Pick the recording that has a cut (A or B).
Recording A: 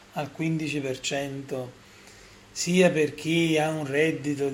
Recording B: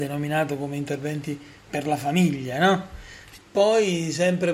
B